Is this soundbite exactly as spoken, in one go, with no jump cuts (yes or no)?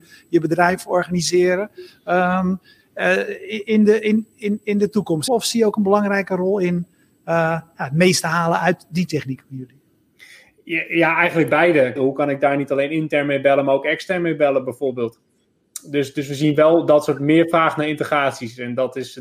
no